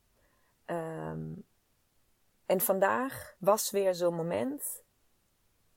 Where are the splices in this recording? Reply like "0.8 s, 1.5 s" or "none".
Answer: 3.4 s